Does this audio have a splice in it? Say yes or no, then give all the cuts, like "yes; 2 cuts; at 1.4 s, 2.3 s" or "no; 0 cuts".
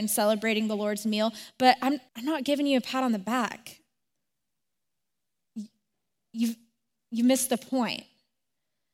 yes; 1 cut; at 2.1 s